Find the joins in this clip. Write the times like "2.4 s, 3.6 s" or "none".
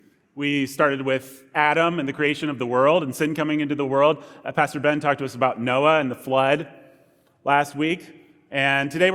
none